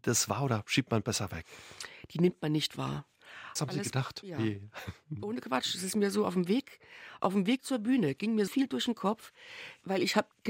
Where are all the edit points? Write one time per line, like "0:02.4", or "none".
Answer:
0:03.6
0:08.5